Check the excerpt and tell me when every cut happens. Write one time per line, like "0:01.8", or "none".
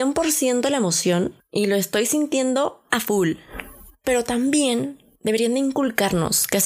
0:01.4

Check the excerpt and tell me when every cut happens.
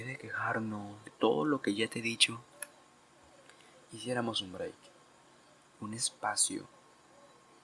0:01.0

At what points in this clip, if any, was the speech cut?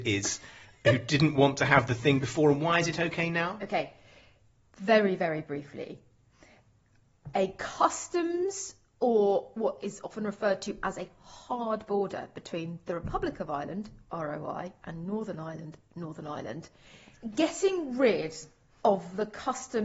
none

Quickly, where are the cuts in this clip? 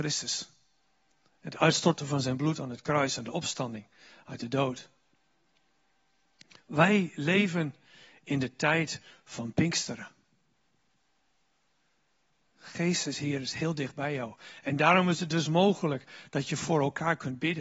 none

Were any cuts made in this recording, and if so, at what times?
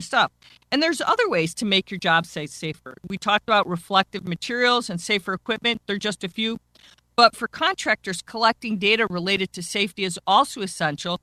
none

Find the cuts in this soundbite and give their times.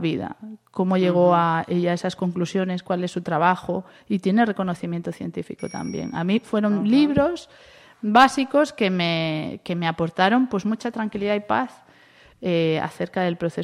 none

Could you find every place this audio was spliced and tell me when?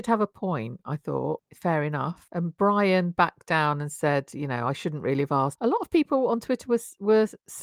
0:05.6

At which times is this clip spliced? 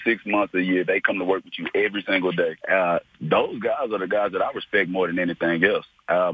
0:02.6

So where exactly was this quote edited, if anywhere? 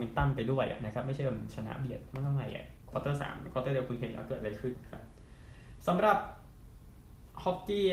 0:04.7

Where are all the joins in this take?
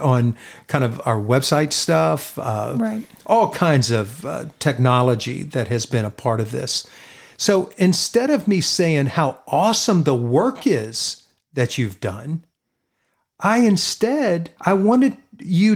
0:14.6

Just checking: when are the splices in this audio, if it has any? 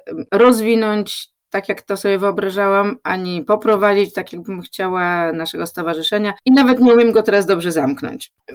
none

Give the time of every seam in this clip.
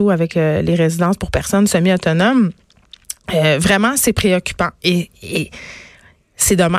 none

